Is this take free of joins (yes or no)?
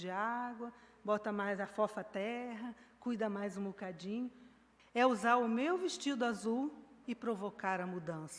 no